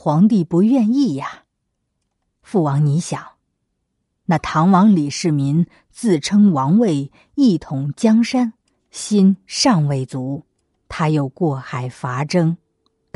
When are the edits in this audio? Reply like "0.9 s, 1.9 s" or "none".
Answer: none